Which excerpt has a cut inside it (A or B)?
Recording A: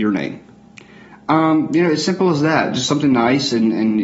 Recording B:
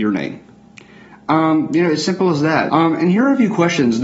B